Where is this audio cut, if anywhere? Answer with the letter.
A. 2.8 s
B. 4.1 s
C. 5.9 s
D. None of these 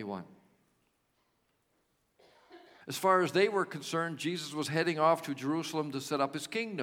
A